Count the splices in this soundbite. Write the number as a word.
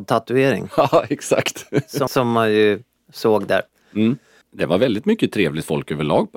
two